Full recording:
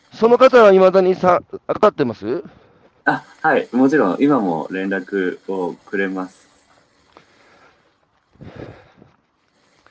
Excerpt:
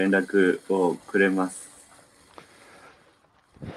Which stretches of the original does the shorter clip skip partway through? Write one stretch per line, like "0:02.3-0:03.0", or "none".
none